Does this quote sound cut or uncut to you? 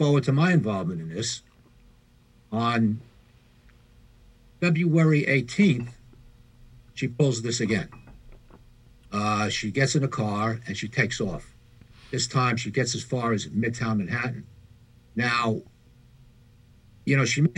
uncut